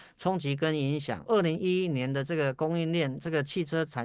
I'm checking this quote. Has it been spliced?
yes; 1 cut; at 1.3 s

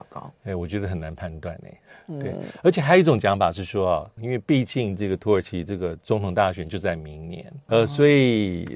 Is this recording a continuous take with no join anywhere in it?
no; 2 cuts; at 4.2 s, 7.7 s

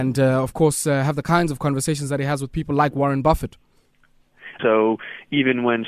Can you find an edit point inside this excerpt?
yes; 1 cut; at 4.6 s

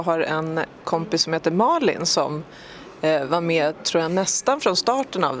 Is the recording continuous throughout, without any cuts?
yes; 0 cuts

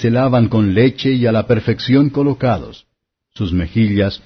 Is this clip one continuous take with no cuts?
yes; 0 cuts

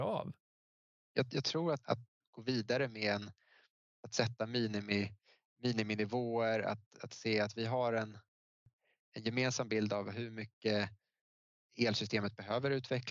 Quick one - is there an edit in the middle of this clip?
no; 0 cuts

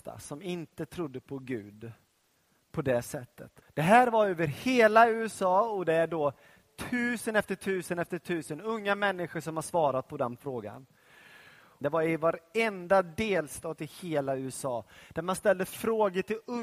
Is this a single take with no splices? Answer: no; 2 cuts; at 3.6 s, 11.8 s

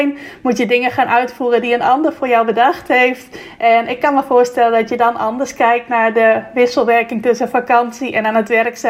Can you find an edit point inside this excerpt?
no; 0 cuts

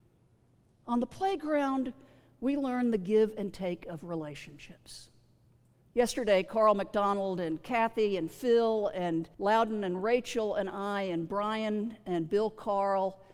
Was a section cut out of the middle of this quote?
yes; 2 cuts; at 5.8 s, 9.3 s

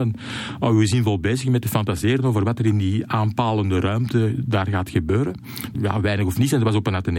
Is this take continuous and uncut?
no; 1 cut; at 5.7 s

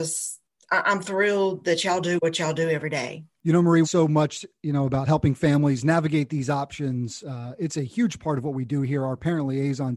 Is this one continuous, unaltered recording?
no; 1 cut; at 3.8 s

